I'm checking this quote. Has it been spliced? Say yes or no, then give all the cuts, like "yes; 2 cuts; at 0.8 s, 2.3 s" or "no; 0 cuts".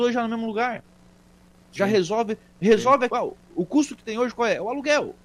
yes; 1 cut; at 3.1 s